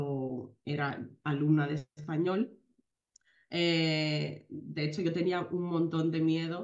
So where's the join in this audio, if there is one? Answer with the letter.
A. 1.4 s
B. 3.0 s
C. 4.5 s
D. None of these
D